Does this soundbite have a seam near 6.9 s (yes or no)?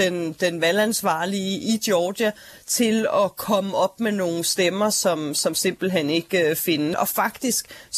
yes